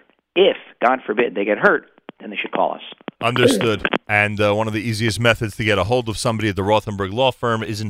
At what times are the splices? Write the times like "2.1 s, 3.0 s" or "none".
3.2 s